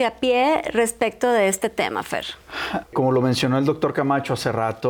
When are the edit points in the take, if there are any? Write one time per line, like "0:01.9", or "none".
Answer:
0:02.8